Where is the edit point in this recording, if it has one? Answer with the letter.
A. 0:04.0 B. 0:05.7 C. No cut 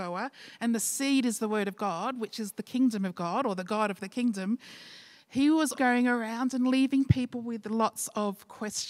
B